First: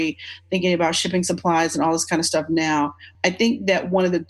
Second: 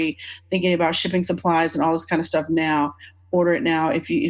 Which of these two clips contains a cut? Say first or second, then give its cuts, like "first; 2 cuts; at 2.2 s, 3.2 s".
first; 1 cut; at 3.1 s